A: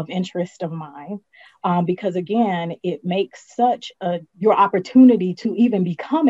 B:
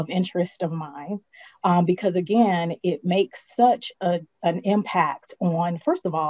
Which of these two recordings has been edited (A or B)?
A